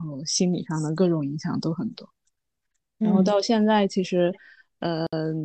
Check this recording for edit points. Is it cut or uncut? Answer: uncut